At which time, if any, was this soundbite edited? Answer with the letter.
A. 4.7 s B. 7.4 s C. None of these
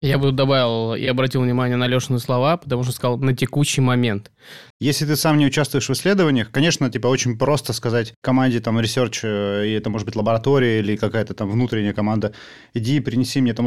A